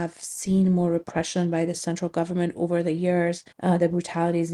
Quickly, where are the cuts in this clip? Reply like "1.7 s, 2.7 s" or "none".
3.5 s